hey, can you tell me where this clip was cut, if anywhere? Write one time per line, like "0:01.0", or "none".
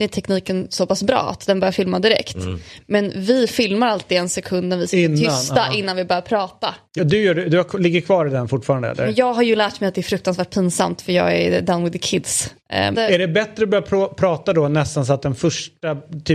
0:07.0
0:12.9